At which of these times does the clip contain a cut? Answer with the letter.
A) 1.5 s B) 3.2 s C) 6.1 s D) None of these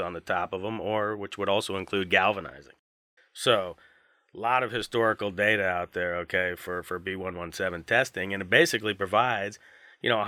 B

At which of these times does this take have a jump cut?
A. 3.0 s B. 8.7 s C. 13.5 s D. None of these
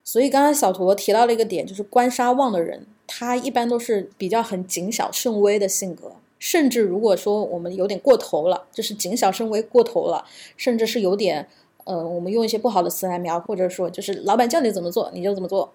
C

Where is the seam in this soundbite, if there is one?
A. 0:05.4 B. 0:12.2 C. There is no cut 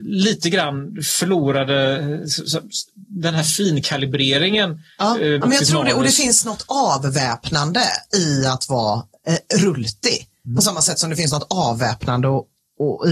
A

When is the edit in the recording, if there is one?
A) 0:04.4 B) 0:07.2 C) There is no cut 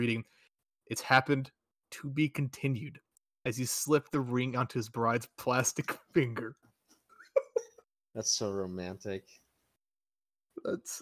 C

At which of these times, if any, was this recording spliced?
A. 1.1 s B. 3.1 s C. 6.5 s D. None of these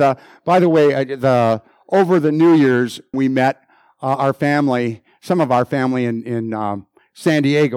B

